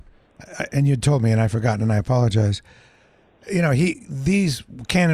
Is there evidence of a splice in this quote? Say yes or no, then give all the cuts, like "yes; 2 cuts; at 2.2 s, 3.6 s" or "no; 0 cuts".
no; 0 cuts